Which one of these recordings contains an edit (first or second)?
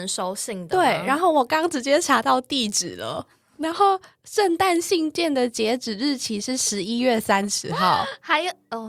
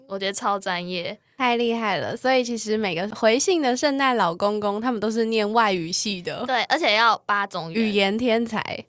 second